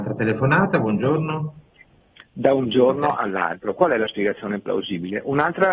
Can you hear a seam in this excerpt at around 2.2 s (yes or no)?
yes